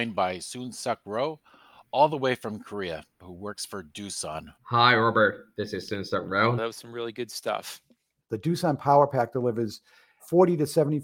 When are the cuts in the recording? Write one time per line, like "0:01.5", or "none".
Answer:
0:04.6
0:06.6
0:08.2